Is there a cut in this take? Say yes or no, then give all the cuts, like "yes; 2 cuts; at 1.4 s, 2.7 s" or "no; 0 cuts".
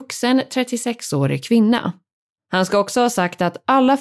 yes; 1 cut; at 2.4 s